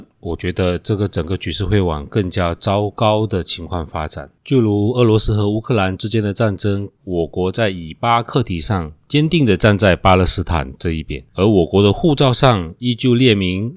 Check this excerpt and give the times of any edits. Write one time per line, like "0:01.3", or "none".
0:07.0